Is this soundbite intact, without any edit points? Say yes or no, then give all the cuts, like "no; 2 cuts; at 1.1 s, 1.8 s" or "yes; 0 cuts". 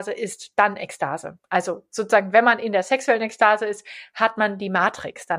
yes; 0 cuts